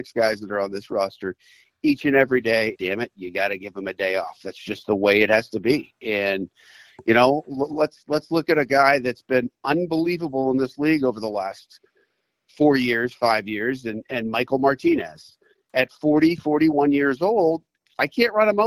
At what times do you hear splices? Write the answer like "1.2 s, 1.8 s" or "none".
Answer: 2.7 s